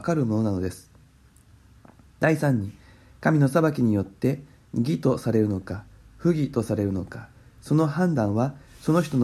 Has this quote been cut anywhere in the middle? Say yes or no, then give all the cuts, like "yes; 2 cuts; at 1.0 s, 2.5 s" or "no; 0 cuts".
no; 0 cuts